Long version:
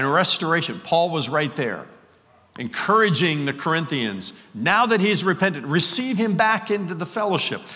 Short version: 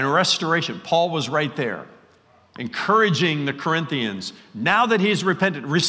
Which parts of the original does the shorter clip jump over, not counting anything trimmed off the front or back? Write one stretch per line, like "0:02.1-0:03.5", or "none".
none